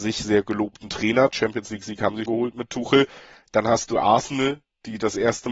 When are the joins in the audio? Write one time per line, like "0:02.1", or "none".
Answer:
0:02.3